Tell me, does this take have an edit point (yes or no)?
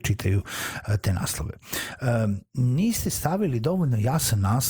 no